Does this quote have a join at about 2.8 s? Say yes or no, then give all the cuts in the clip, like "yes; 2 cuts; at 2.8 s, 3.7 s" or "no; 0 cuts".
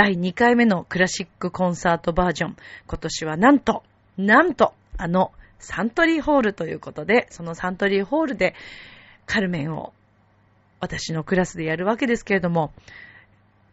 no; 0 cuts